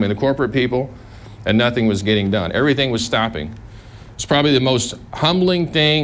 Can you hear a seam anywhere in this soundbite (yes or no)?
yes